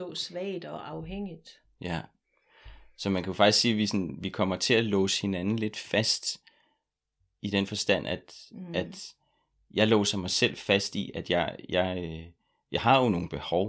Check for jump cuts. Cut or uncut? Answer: uncut